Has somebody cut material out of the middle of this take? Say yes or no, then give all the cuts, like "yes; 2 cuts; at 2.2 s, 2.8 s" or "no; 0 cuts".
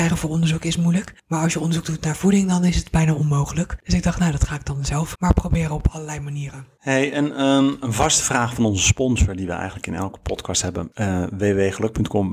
yes; 1 cut; at 5.1 s